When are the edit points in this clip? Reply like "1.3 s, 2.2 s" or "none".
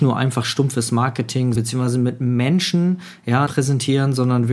1.6 s, 3.5 s